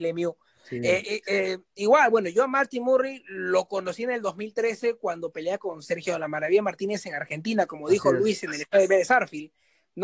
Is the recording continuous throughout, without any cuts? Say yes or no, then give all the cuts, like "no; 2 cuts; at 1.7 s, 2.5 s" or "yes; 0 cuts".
yes; 0 cuts